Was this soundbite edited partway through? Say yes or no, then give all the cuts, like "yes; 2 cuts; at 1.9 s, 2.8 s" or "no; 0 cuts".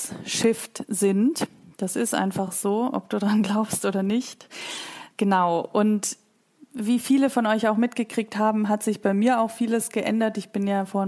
no; 0 cuts